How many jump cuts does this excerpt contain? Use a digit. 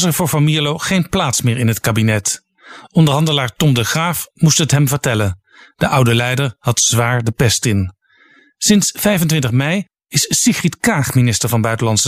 0